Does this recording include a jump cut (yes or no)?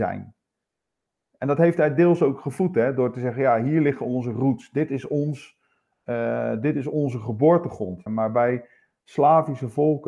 yes